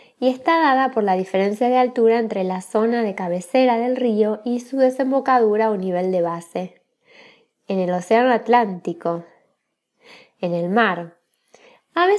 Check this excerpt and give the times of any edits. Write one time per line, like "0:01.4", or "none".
0:07.5